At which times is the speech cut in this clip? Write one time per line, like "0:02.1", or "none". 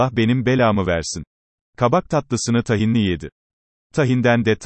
0:01.6